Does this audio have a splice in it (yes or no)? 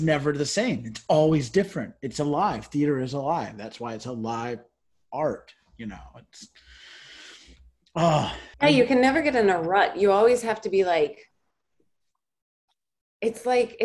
yes